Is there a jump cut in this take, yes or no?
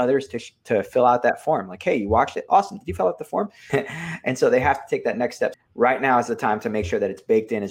yes